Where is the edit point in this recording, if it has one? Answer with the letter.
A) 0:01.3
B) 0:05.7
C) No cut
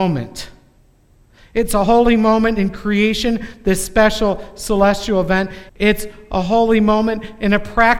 B